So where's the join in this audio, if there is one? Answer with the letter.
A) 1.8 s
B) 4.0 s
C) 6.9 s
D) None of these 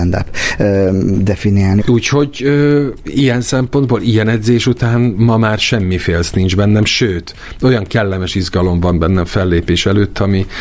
A